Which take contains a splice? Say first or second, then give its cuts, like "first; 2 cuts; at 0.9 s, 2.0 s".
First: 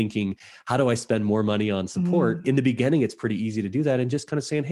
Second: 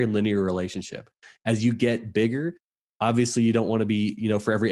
first; 1 cut; at 2.4 s